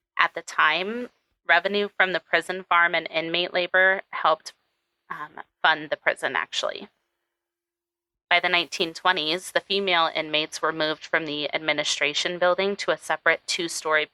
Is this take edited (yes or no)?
no